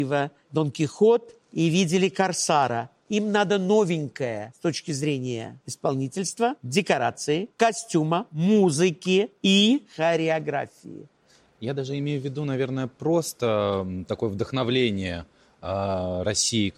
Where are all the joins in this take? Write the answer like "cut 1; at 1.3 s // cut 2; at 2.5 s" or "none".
none